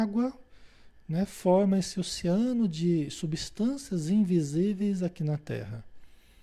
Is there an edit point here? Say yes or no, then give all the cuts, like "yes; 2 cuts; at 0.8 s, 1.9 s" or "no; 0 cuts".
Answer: no; 0 cuts